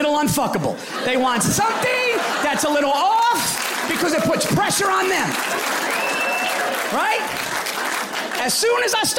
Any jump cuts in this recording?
no; 0 cuts

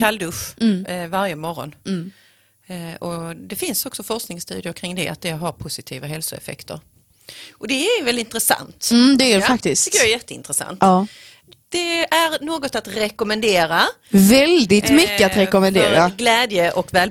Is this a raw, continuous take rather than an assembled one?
yes; 0 cuts

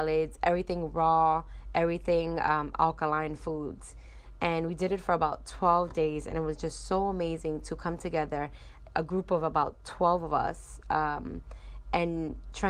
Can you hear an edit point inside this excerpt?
no; 0 cuts

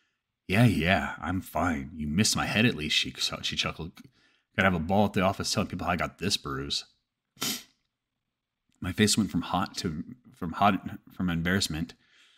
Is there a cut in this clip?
no; 0 cuts

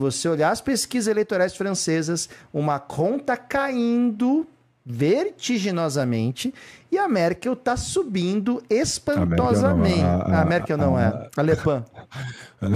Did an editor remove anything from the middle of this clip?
no; 0 cuts

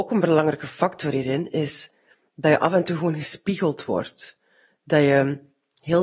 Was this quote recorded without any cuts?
yes; 0 cuts

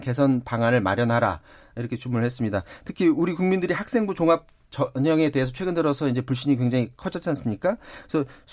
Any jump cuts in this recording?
no; 0 cuts

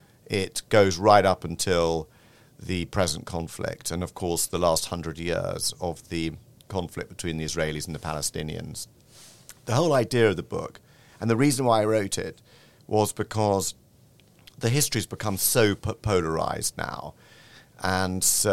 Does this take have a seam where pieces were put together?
no; 0 cuts

